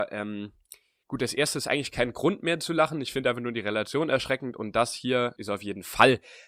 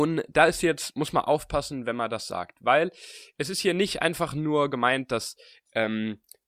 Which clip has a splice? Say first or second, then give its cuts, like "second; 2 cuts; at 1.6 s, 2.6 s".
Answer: first; 1 cut; at 5.4 s